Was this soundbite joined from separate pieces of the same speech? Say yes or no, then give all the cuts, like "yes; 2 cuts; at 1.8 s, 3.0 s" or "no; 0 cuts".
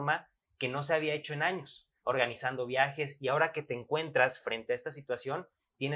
yes; 1 cut; at 2.0 s